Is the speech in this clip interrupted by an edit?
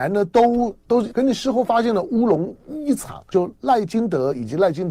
yes; 2 cuts; at 1.1 s, 3.3 s

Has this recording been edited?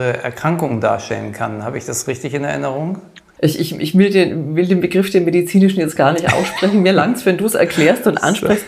yes; 1 cut; at 3.4 s

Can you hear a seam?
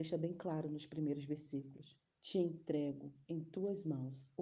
yes; 1 cut; at 2.1 s

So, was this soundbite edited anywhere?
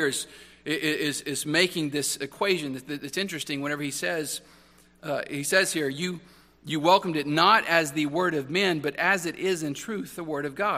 no; 0 cuts

